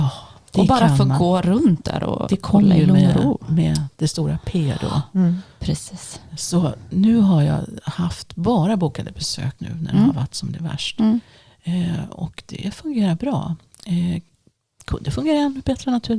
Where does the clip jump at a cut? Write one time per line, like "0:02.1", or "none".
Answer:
0:09.6